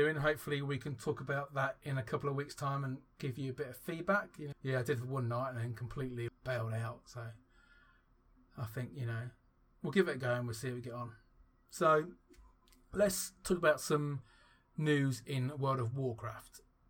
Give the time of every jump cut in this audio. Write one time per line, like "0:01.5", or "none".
0:04.5
0:06.3